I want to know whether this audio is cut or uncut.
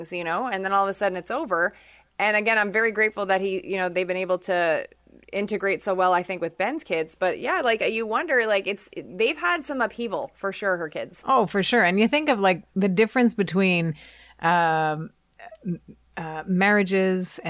uncut